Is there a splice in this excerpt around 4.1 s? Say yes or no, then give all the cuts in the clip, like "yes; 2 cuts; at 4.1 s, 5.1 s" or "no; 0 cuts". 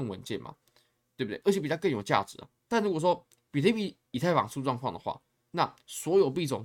no; 1 cut; at 2.6 s